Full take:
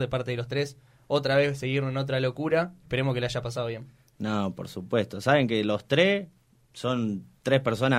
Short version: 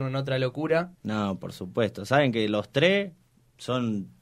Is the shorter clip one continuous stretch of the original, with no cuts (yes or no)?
no